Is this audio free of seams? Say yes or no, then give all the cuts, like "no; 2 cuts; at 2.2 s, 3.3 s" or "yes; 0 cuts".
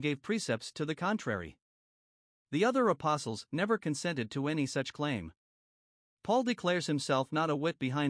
yes; 0 cuts